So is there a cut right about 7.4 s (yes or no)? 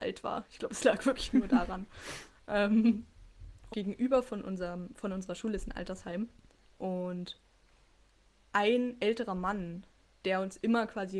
no